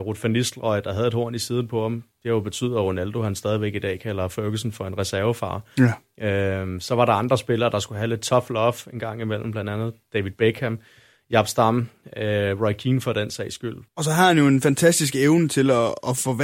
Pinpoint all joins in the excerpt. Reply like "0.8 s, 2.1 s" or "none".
13.9 s